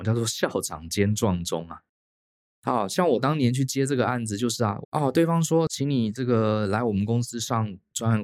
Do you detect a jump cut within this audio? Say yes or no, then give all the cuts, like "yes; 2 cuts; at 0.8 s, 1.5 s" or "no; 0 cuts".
yes; 1 cut; at 4.8 s